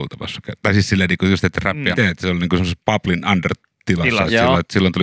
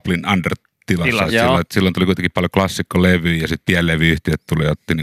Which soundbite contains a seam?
first; 1 cut; at 1.9 s

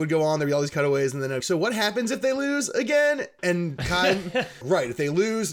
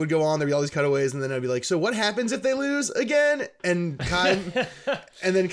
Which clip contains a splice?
first; 2 cuts; at 1.4 s, 4.6 s

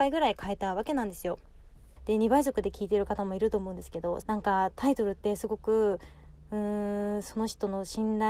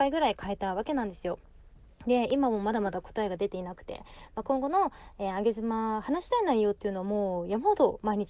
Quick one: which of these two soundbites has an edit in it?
first; 2 cuts; at 2.0 s, 4.2 s

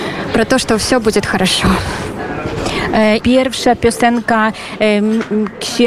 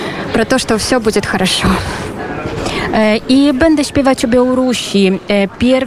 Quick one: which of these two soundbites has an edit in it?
first; 1 cut; at 3.2 s

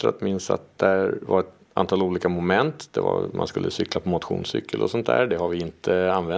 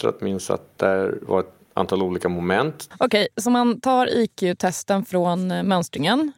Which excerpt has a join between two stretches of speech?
second; 1 cut; at 2.9 s

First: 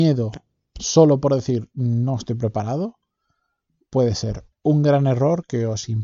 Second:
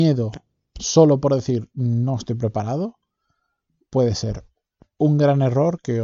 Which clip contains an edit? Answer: first; 1 cut; at 4.5 s

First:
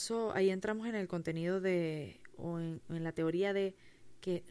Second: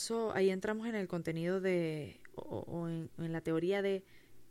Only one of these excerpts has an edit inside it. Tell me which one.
first; 1 cut; at 2.4 s

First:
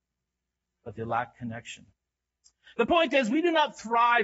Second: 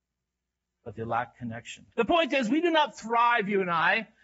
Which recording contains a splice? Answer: second; 1 cut; at 1.9 s

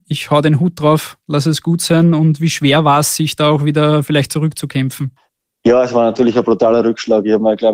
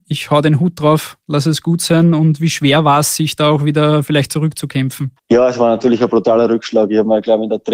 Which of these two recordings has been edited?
second; 1 cut; at 5.2 s

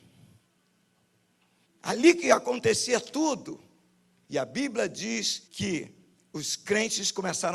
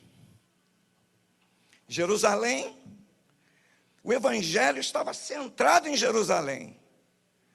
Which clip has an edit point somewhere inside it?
first; 3 cuts; at 1.6 s, 4.2 s, 5.5 s

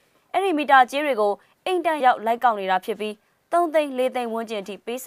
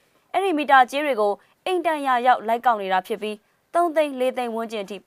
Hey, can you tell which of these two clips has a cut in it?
first; 1 cut; at 2.0 s

